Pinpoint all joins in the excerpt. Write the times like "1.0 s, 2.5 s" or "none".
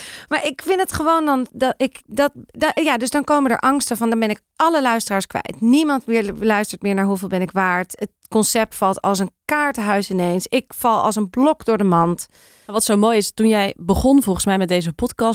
2.0 s